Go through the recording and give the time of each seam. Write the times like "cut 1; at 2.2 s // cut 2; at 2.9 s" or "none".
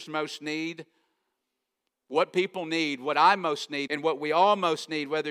cut 1; at 1.9 s // cut 2; at 3.9 s